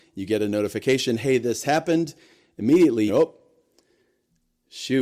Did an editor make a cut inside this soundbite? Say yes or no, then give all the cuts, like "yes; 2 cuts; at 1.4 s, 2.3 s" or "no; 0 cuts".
yes; 1 cut; at 3.1 s